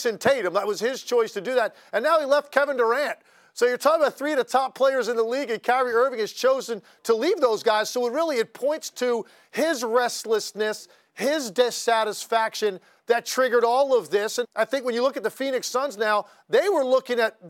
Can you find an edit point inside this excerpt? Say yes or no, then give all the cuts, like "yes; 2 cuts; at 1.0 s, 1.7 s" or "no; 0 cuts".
yes; 1 cut; at 14.4 s